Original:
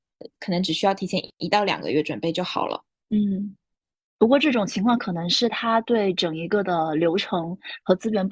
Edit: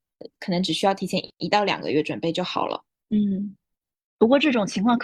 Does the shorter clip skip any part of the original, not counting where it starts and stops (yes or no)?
no